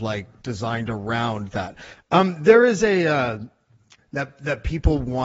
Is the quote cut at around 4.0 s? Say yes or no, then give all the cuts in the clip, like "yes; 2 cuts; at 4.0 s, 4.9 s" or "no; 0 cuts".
yes; 2 cuts; at 1.9 s, 4.0 s